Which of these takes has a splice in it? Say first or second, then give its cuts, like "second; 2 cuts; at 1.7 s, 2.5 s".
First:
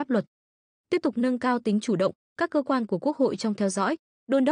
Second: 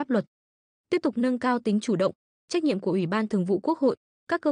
first; 1 cut; at 2.2 s